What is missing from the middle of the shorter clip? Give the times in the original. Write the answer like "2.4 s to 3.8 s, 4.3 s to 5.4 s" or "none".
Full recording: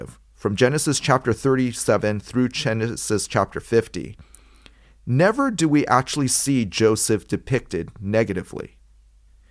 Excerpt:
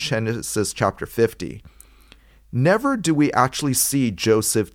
none